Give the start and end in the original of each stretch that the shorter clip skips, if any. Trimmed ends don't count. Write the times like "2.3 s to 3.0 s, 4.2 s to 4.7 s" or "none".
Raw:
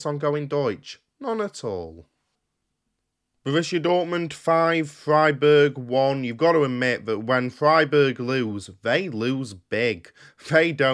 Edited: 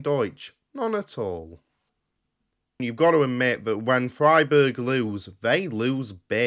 3.3 s to 6.2 s